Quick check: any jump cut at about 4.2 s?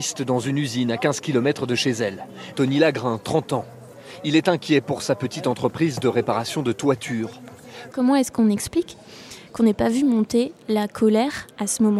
no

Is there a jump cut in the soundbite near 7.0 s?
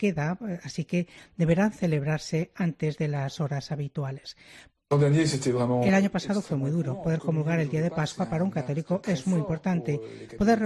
no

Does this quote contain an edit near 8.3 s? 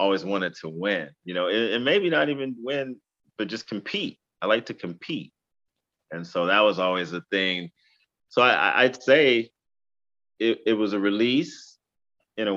no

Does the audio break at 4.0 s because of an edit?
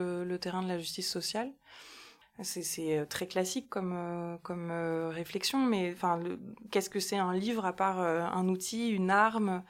no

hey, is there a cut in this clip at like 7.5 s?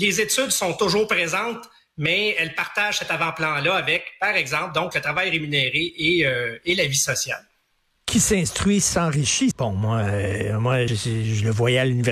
no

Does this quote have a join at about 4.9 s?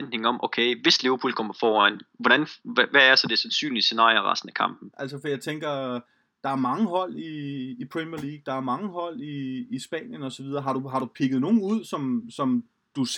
yes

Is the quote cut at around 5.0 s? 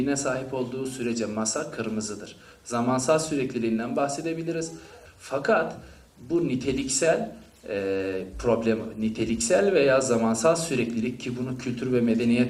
yes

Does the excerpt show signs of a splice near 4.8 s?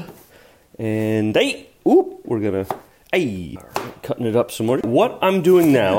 yes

